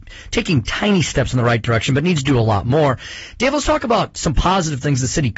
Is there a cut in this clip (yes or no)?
no